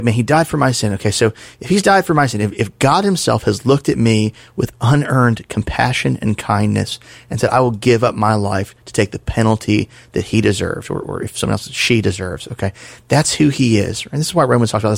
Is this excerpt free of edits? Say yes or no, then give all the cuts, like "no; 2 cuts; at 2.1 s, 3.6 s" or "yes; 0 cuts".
yes; 0 cuts